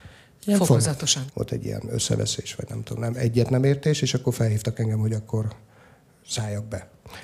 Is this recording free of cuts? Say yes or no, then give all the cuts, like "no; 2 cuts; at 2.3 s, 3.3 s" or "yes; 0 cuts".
no; 1 cut; at 1.3 s